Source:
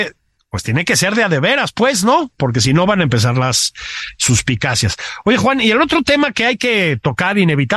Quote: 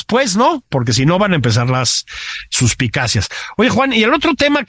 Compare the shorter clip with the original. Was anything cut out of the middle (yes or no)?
no